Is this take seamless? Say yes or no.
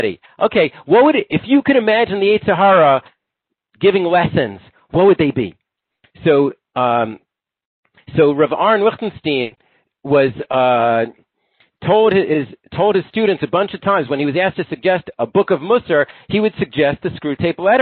yes